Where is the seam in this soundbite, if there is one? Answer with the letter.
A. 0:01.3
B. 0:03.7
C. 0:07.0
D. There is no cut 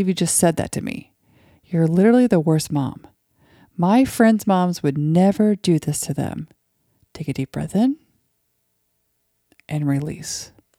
D